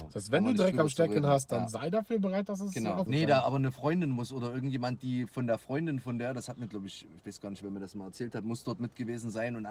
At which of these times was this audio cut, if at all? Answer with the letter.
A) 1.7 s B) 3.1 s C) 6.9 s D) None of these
B